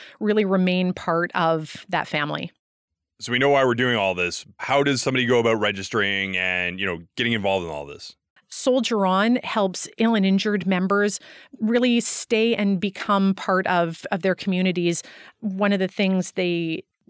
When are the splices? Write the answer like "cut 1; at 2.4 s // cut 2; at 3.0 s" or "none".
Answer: cut 1; at 8.4 s

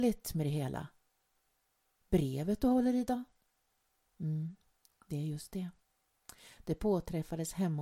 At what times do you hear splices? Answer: none

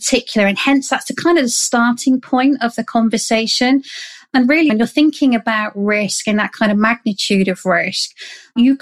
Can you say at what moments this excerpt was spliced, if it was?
cut 1; at 4.7 s

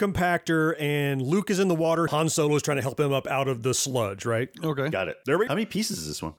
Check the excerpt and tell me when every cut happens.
cut 1; at 2.1 s // cut 2; at 5.5 s

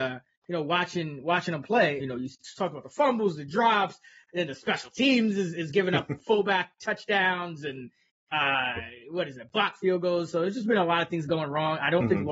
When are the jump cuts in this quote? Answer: cut 1; at 2.0 s

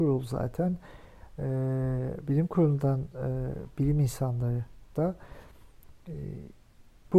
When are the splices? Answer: none

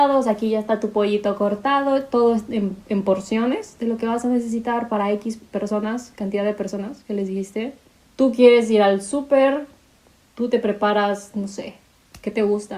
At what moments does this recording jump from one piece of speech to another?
cut 1; at 8.1 s // cut 2; at 10.3 s

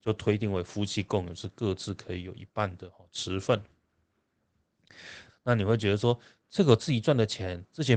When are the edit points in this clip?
cut 1; at 5.3 s

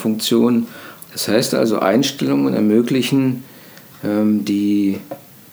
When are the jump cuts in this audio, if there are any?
cut 1; at 1.0 s

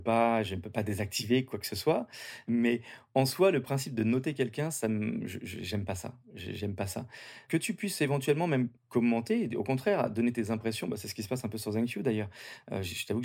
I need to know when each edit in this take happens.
cut 1; at 8.8 s

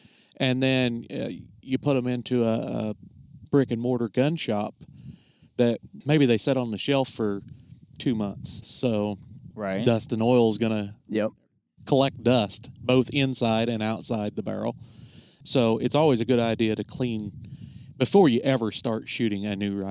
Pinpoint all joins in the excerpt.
cut 1; at 8.6 s

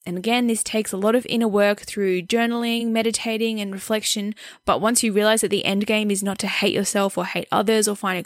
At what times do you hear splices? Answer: none

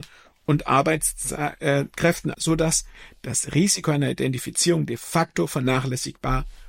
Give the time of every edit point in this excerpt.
cut 1; at 2.3 s

